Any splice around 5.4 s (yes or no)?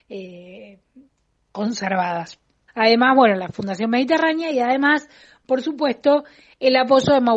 no